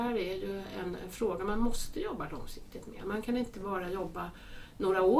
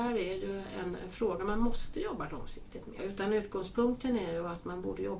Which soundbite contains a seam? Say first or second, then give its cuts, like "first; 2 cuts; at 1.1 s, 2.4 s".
second; 1 cut; at 3.0 s